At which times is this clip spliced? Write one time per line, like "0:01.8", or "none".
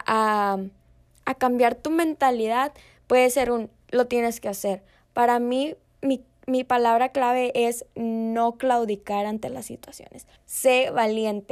0:10.4